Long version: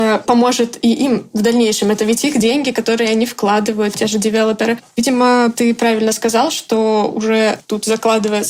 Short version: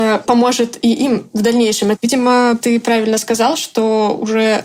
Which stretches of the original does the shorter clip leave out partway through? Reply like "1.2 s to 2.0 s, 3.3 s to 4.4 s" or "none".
1.9 s to 4.9 s